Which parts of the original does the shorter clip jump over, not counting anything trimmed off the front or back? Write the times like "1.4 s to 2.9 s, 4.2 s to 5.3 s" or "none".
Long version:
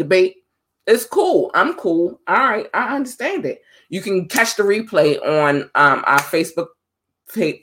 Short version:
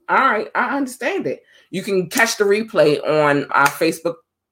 5.7 s to 6.0 s